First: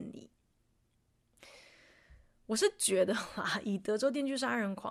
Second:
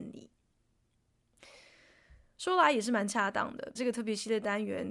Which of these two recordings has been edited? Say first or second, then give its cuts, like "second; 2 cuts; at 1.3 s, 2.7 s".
second; 2 cuts; at 2.4 s, 3.8 s